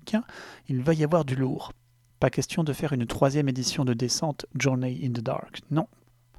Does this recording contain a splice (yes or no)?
no